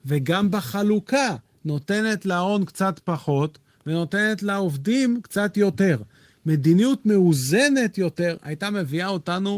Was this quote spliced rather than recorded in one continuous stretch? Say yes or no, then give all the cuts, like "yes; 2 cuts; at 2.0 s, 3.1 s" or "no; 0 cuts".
no; 0 cuts